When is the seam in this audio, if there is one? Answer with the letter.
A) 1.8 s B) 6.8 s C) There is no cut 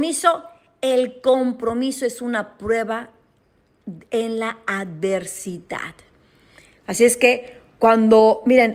B